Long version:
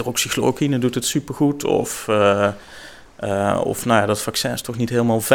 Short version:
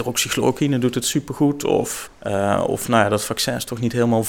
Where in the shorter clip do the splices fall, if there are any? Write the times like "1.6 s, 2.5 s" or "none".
2.1 s